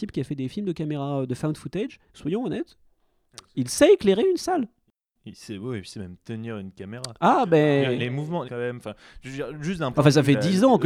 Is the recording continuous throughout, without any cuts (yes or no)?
no